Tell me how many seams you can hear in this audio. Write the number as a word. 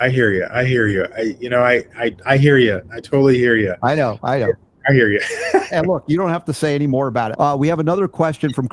two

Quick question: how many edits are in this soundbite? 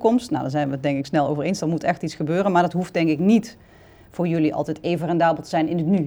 zero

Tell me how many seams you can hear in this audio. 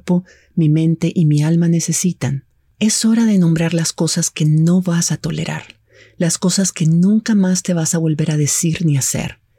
one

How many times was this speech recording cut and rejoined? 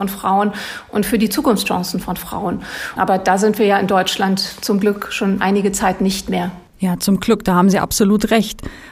one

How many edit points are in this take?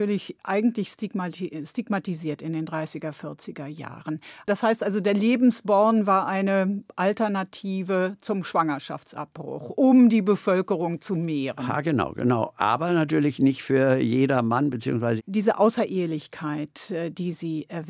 two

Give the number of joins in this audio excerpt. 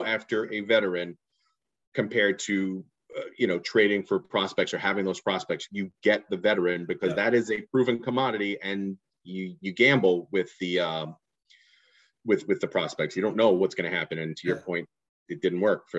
zero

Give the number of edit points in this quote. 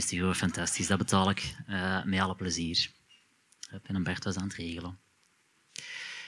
zero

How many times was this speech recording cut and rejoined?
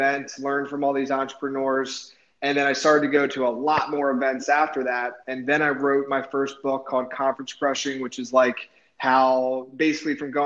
zero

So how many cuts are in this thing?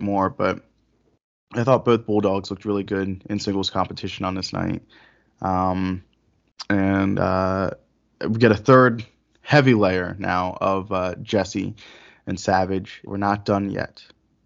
one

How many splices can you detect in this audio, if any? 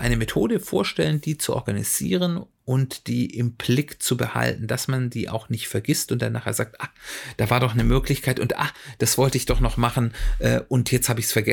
zero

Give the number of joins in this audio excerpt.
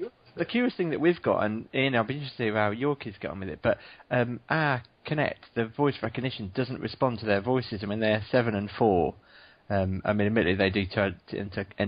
zero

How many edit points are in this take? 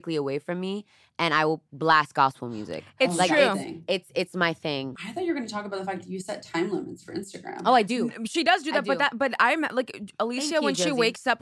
one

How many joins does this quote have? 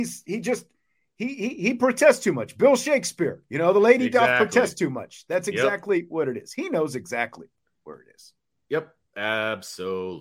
zero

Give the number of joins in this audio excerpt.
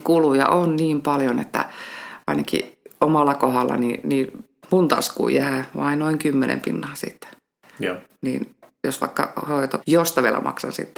one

